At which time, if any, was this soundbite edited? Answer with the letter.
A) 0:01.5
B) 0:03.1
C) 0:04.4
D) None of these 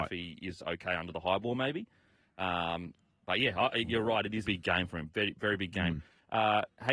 C